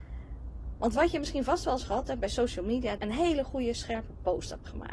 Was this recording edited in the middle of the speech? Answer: yes; 1 cut; at 3.0 s

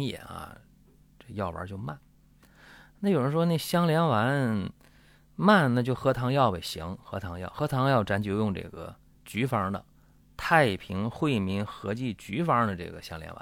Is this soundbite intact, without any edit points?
yes; 0 cuts

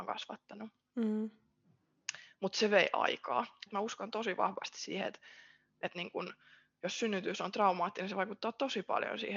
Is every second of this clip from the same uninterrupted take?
no; 1 cut; at 3.7 s

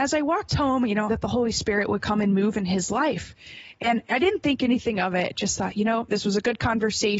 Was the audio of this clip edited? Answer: yes; 1 cut; at 1.1 s

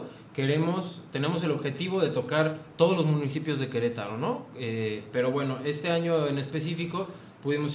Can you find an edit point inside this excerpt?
no; 0 cuts

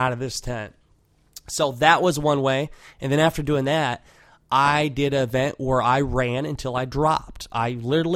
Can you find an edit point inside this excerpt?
no; 0 cuts

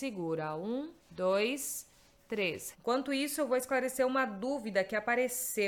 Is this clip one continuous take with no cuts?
no; 2 cuts; at 1.0 s, 2.7 s

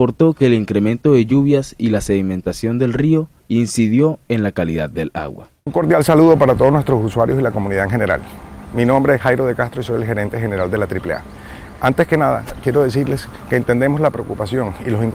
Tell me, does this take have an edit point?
no; 0 cuts

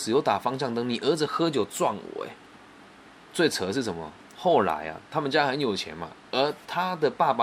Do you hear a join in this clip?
no; 0 cuts

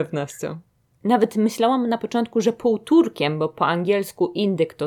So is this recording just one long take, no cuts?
no; 1 cut; at 0.9 s

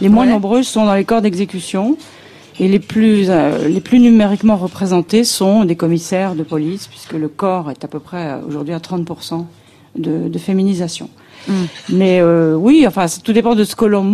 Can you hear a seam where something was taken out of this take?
no; 0 cuts

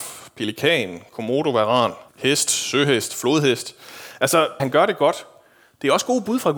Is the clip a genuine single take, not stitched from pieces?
no; 2 cuts; at 2.1 s, 4.6 s

